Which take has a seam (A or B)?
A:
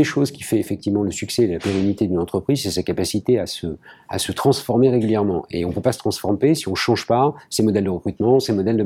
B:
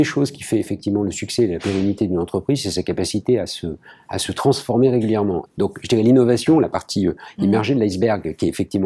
B